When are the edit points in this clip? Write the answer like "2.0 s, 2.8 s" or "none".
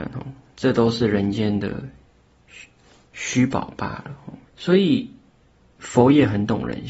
4.5 s